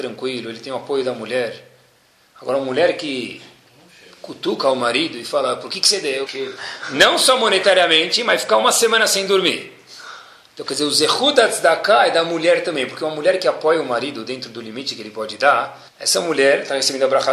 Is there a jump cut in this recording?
yes; 2 cuts; at 6.3 s, 15.9 s

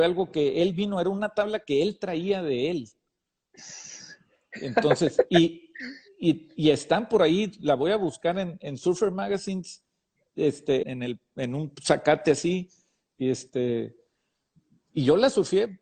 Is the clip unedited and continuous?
no; 1 cut; at 10.8 s

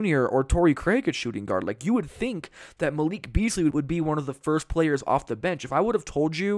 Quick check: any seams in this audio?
yes; 1 cut; at 3.7 s

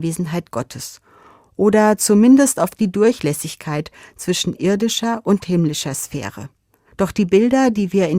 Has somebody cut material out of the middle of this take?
yes; 1 cut; at 6.9 s

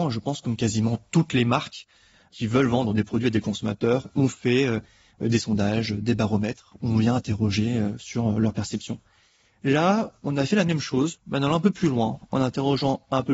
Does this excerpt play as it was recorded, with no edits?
yes; 0 cuts

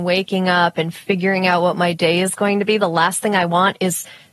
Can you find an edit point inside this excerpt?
no; 0 cuts

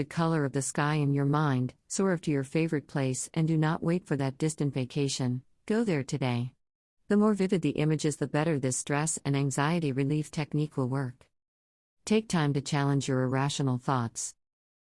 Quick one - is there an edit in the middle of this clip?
no; 0 cuts

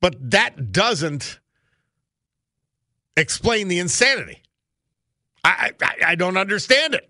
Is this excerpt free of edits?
yes; 0 cuts

